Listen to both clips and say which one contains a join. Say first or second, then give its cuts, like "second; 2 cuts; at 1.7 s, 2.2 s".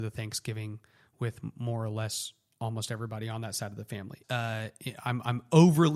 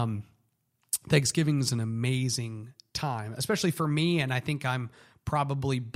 first; 1 cut; at 4.2 s